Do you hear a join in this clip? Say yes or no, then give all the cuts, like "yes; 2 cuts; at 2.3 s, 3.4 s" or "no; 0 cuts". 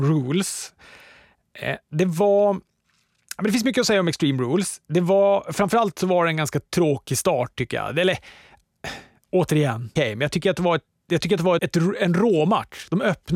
yes; 2 cuts; at 10.0 s, 11.6 s